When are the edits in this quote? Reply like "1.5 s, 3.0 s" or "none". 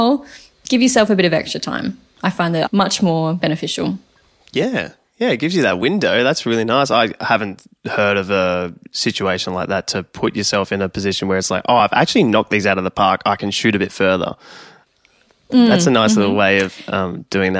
none